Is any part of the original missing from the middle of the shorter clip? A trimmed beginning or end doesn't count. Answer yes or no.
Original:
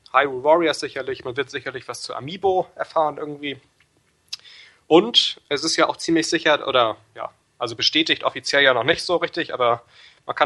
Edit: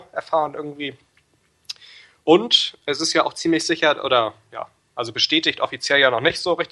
no